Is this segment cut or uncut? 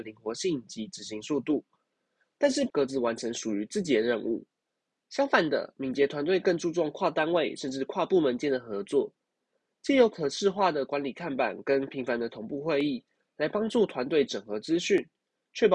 cut